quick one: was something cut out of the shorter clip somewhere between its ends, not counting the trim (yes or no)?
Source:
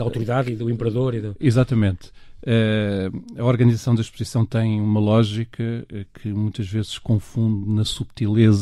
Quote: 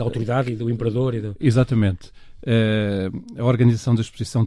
no